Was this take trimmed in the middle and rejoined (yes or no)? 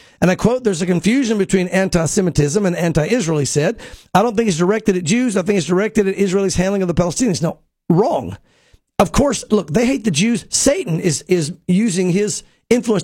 no